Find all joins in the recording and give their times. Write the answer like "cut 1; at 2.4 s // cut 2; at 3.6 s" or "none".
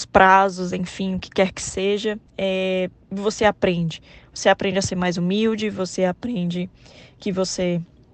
cut 1; at 2.3 s